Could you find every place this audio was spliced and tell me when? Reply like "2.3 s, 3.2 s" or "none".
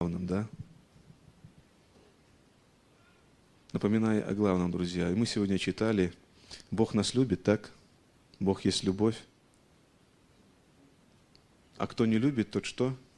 none